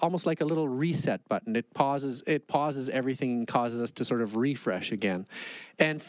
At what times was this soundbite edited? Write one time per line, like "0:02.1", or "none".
none